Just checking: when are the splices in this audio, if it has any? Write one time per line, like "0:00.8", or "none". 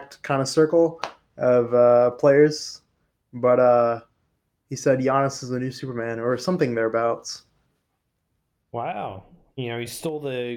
none